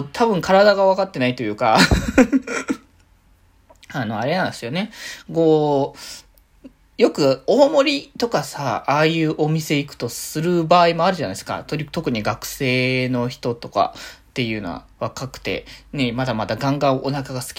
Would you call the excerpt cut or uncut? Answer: uncut